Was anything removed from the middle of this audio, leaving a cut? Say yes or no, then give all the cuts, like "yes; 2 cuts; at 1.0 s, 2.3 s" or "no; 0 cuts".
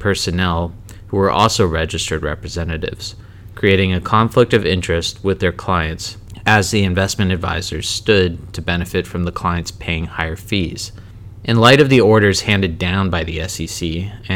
no; 0 cuts